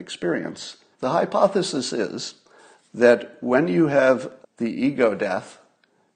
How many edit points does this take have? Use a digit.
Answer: 2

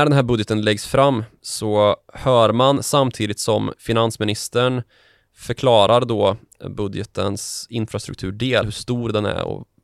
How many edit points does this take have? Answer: 0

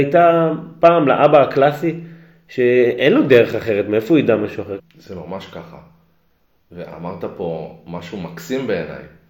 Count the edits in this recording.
1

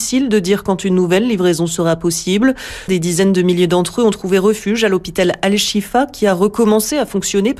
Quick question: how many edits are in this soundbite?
1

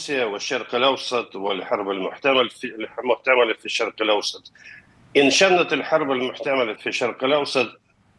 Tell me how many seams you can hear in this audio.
1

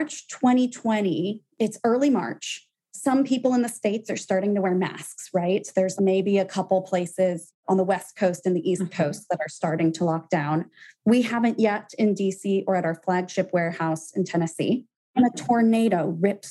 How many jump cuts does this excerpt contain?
1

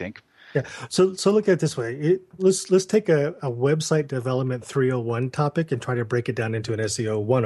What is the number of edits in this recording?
1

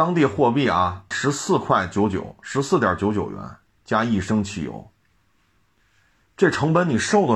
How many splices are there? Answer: 1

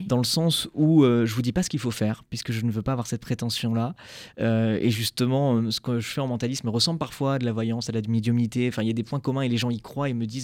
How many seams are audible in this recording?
0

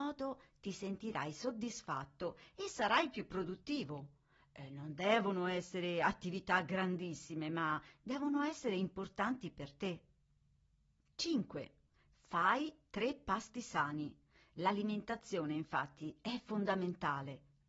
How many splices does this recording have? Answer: 0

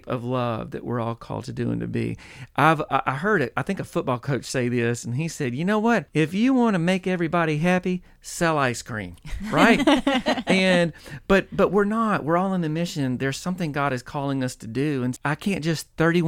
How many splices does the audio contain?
2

